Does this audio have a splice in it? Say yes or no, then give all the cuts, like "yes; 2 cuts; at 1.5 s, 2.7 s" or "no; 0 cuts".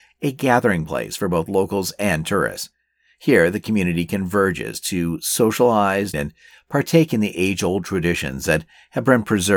yes; 1 cut; at 6.1 s